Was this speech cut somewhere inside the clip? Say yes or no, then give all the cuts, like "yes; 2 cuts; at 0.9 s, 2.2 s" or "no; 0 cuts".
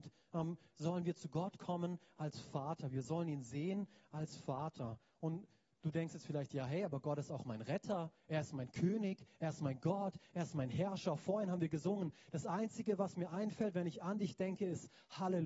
no; 0 cuts